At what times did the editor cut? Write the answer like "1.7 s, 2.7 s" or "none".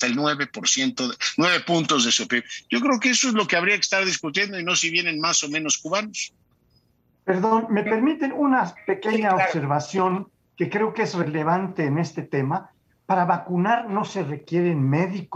none